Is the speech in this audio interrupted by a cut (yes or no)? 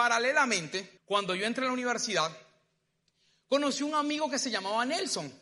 yes